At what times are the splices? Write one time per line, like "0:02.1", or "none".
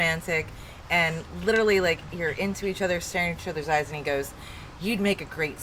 none